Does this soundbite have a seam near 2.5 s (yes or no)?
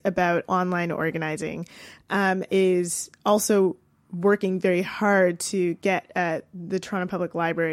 yes